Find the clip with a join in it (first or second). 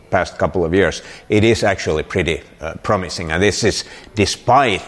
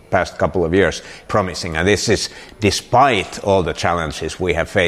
second